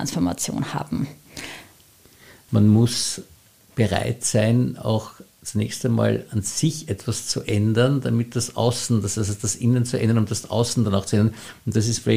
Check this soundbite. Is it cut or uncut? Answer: uncut